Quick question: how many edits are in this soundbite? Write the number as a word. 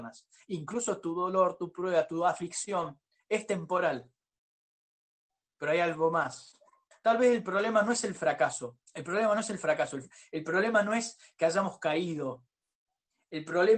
two